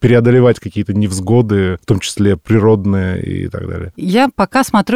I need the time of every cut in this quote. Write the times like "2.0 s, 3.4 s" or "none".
none